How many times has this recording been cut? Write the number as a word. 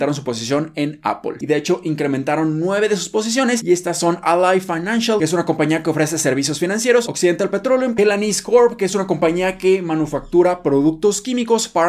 two